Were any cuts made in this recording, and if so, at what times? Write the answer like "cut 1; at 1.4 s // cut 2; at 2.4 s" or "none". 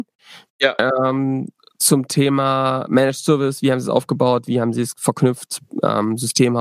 none